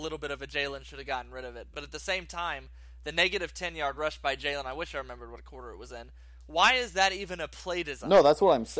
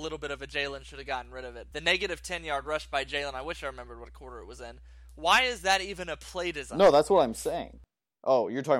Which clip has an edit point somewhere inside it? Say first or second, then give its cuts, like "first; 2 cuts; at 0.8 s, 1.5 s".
second; 1 cut; at 1.7 s